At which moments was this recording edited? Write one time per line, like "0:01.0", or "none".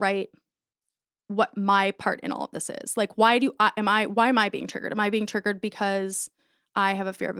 none